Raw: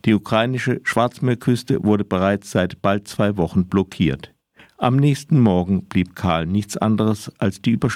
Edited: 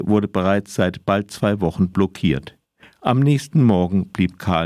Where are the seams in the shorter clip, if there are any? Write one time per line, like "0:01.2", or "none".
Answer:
none